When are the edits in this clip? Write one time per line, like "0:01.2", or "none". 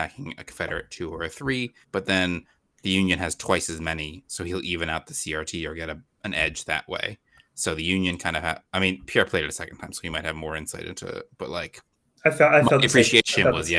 0:01.8